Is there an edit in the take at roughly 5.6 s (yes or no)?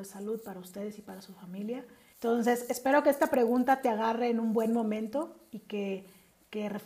no